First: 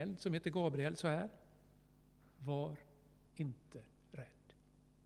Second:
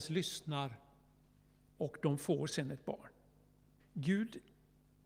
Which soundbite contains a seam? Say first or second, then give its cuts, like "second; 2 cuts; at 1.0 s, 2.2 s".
second; 1 cut; at 3.8 s